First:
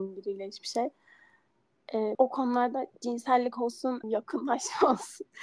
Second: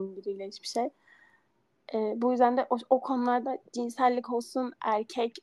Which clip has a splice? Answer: first; 2 cuts; at 2.1 s, 4.0 s

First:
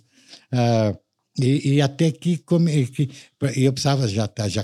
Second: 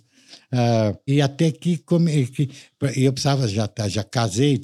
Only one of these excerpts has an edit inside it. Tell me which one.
second; 1 cut; at 1.1 s

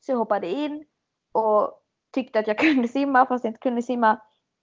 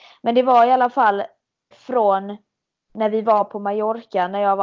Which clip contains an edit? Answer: second; 1 cut; at 1.7 s

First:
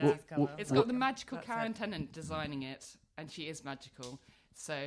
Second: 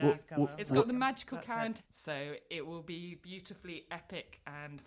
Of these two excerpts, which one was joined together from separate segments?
second; 1 cut; at 1.8 s

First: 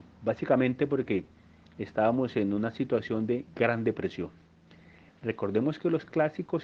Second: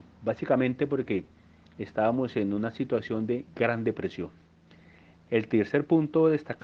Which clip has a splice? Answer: first; 1 cut; at 5.1 s

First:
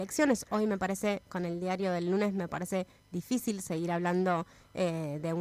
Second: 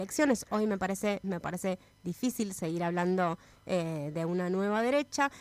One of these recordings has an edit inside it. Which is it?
second; 1 cut; at 1.2 s

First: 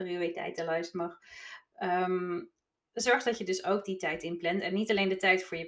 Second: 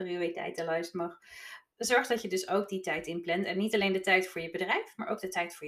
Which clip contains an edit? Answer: second; 1 cut; at 1.7 s

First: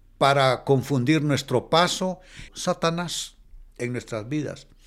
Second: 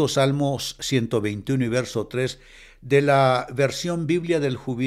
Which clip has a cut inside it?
first; 1 cut; at 2.5 s

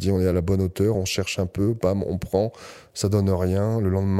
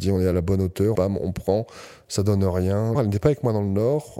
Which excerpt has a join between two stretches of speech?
second; 2 cuts; at 0.9 s, 2.9 s

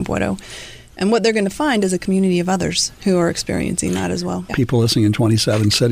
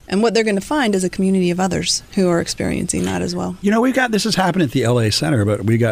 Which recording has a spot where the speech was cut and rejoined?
first; 1 cut; at 4.5 s

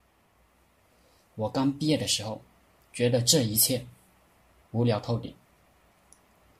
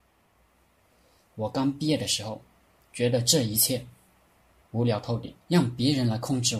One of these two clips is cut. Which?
second; 1 cut; at 5.4 s

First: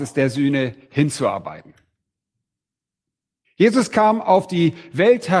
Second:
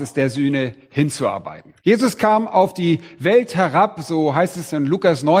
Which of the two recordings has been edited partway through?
second; 1 cut; at 1.8 s

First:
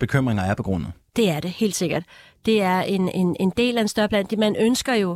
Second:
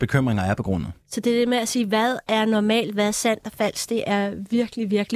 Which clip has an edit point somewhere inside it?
second; 1 cut; at 1.0 s

